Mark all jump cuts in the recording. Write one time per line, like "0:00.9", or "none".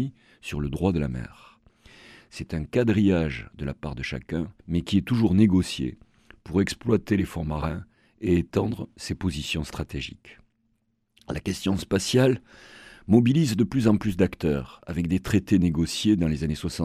0:02.2
0:04.6